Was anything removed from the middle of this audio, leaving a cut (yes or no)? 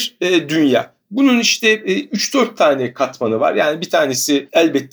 no